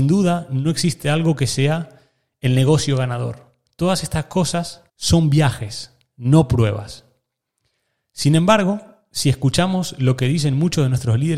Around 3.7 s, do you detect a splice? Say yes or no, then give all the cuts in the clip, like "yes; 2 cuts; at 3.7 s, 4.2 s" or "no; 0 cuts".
no; 1 cut; at 4.9 s